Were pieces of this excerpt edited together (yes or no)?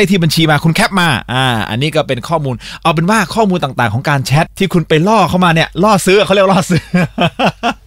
yes